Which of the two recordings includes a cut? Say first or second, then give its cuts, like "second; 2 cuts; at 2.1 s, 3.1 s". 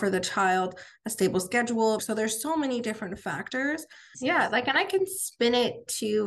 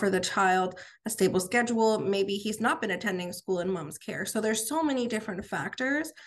first; 2 cuts; at 2.0 s, 4.1 s